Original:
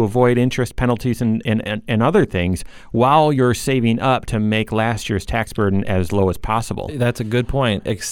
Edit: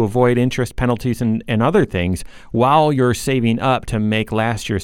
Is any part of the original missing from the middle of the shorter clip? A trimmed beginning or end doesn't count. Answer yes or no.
yes